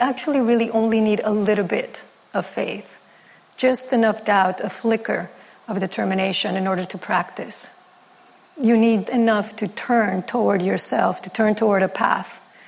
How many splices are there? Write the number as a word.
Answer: one